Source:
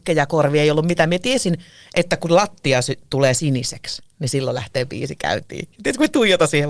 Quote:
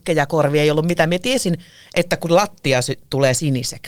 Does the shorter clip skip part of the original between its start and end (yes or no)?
no